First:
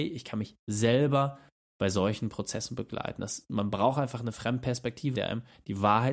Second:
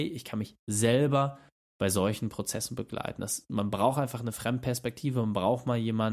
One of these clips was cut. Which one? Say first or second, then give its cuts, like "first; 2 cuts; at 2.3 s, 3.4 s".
first; 1 cut; at 5.1 s